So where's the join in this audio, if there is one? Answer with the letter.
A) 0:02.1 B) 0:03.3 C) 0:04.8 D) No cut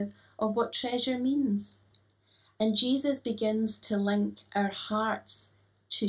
D